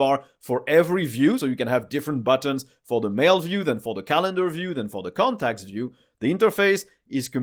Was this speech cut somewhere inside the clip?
no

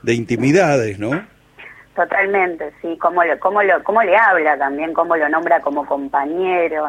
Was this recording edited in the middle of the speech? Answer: no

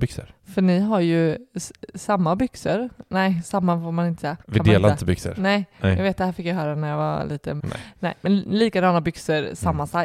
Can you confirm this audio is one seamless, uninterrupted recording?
no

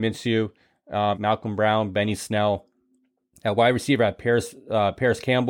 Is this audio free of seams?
no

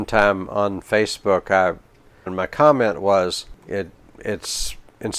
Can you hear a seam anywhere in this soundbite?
yes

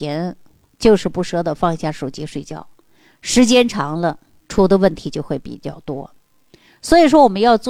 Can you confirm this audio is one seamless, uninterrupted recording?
no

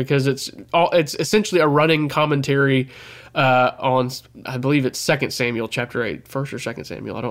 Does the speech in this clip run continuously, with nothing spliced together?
no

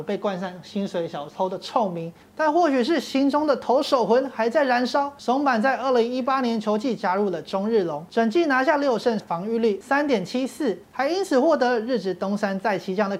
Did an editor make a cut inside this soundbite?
yes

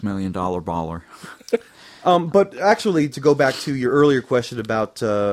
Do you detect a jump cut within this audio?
yes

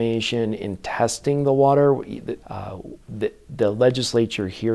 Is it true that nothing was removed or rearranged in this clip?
no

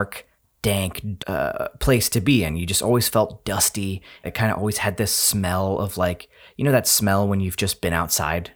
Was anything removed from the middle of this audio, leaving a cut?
yes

